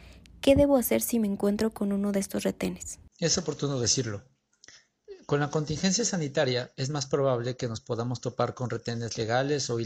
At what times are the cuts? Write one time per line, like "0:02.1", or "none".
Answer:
0:03.1